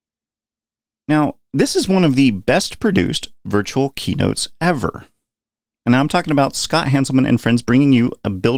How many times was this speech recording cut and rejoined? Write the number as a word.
zero